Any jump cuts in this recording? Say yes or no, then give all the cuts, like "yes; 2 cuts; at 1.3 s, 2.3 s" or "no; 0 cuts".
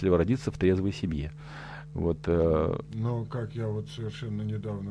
no; 0 cuts